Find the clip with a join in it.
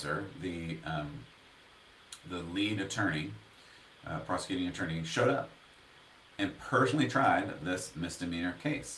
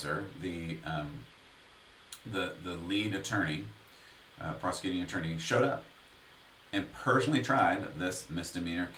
first; 1 cut; at 2.2 s

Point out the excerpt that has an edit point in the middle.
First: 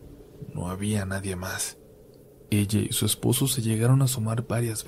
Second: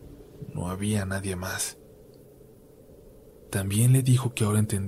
first; 1 cut; at 2.5 s

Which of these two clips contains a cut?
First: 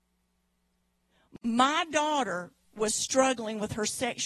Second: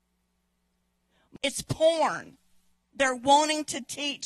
second; 1 cut; at 1.4 s

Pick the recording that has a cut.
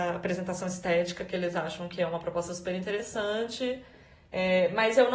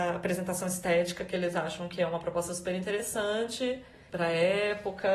second; 1 cut; at 4.1 s

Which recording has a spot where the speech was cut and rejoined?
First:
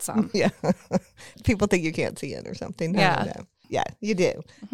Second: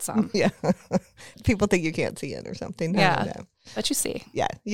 first; 1 cut; at 3.6 s

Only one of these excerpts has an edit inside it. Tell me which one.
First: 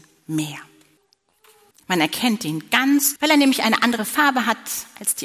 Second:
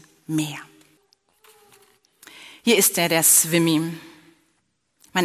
first; 2 cuts; at 1.7 s, 3.2 s

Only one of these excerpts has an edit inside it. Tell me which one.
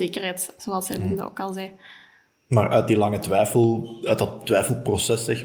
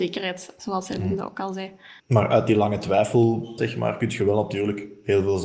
second; 2 cuts; at 2.0 s, 3.6 s

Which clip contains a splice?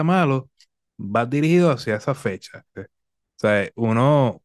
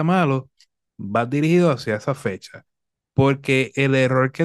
first; 1 cut; at 2.7 s

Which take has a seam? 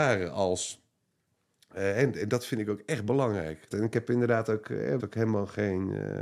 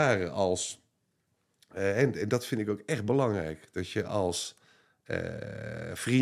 first; 2 cuts; at 3.7 s, 5.0 s

